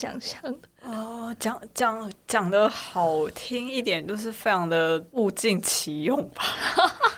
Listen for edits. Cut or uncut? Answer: uncut